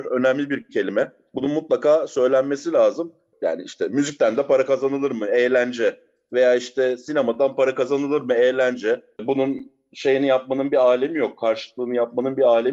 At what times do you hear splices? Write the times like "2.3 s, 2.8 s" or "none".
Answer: 3.3 s, 9.2 s